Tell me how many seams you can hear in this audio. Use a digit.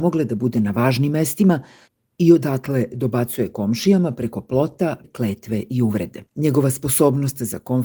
2